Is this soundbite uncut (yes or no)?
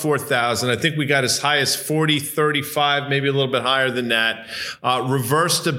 yes